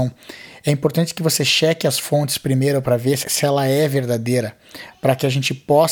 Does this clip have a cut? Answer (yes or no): yes